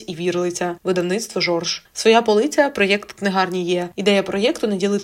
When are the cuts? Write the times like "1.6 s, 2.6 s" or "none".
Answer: none

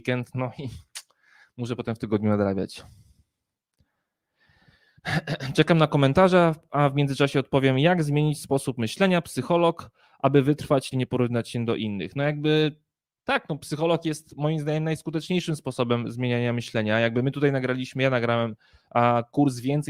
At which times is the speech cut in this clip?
10.9 s

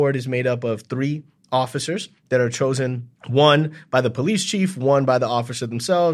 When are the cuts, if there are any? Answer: 3.2 s

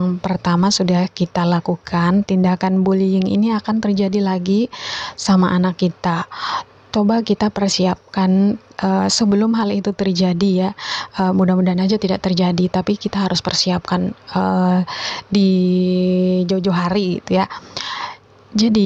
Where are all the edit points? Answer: 2.2 s

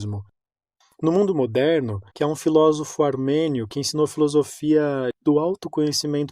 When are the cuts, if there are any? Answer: 2.1 s

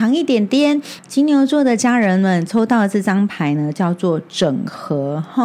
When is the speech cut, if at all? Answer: 1.0 s

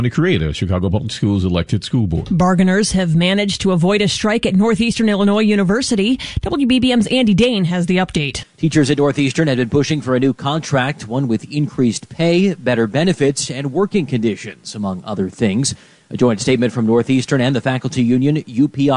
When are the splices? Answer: 8.4 s

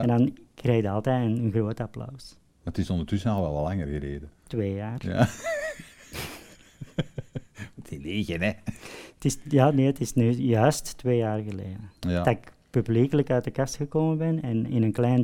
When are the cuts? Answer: 2.5 s

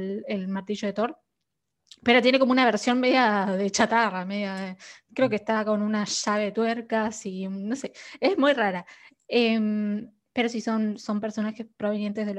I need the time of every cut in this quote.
none

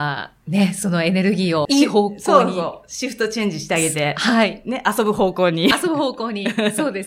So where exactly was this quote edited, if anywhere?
1.6 s

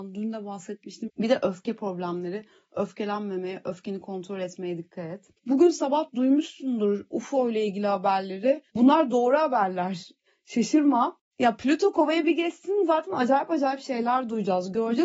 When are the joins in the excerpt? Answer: 1.1 s, 5.4 s

